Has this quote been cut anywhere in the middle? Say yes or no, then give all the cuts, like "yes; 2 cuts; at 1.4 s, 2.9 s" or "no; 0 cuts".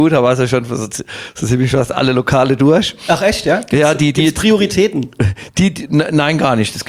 no; 0 cuts